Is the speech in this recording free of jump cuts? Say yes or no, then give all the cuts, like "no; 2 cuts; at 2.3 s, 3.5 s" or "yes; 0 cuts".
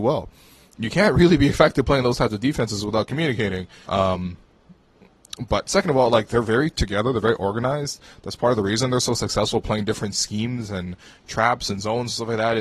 no; 1 cut; at 3.9 s